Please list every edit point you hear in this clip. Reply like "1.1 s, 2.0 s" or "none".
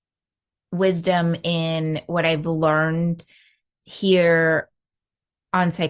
none